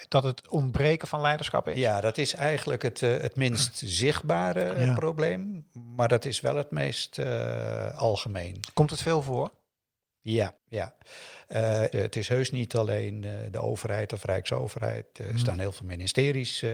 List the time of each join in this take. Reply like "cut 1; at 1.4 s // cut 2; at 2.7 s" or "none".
cut 1; at 10.6 s // cut 2; at 11.9 s